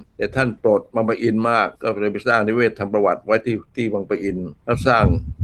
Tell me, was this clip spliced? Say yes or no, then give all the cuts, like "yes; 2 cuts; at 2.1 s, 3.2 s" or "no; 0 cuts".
yes; 1 cut; at 1.8 s